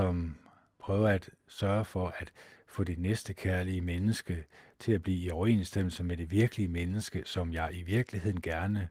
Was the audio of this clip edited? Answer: no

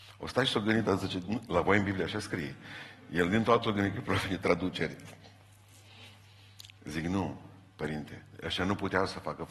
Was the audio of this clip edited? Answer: no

